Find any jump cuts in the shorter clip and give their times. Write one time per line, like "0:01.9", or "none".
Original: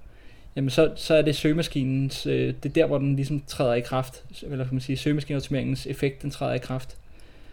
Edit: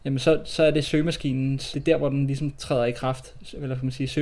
0:01.7